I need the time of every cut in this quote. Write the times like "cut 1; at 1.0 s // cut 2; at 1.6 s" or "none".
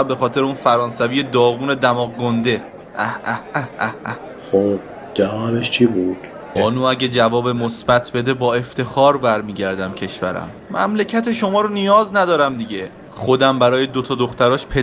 cut 1; at 6.6 s